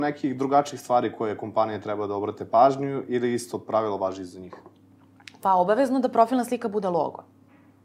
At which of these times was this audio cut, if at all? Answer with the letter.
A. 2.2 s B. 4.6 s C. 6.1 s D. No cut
D